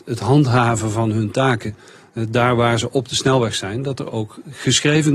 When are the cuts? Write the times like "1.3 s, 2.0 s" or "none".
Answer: none